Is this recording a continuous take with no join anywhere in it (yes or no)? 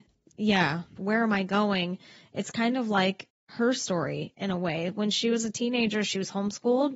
no